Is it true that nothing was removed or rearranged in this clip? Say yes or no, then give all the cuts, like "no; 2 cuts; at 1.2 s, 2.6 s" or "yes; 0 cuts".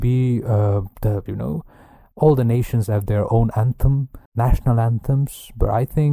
no; 2 cuts; at 1.3 s, 4.3 s